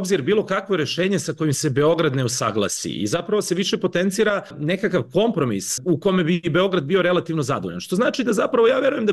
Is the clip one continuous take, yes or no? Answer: yes